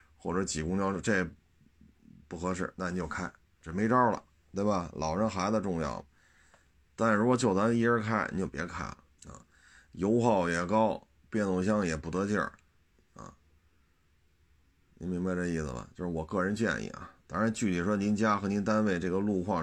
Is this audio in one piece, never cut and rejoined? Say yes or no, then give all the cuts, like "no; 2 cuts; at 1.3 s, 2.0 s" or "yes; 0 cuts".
no; 1 cut; at 9.2 s